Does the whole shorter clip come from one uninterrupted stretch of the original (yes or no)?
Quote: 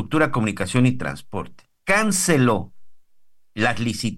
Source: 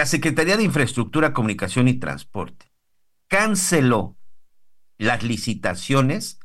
no